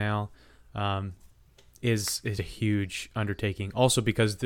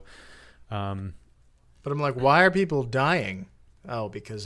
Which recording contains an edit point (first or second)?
first